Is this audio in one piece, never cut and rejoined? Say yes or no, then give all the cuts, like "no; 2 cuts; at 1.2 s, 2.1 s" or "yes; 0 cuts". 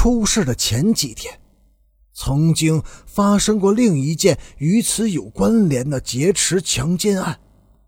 yes; 0 cuts